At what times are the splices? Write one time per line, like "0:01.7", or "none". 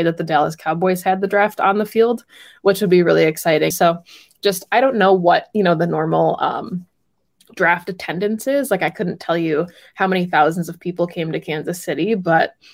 0:03.7